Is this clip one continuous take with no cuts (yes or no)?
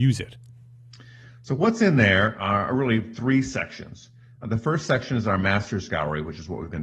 yes